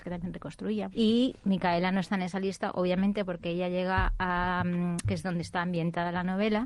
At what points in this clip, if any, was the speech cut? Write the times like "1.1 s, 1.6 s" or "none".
0.9 s, 5.0 s